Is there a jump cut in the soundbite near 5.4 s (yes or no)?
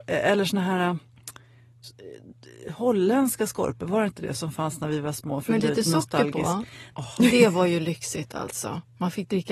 no